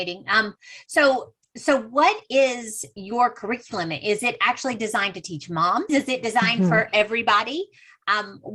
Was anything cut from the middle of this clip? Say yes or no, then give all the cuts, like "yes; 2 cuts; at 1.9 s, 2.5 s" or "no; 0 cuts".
yes; 1 cut; at 5.9 s